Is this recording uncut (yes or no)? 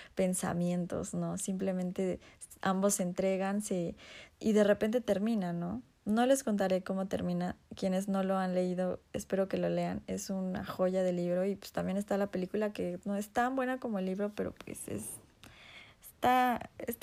no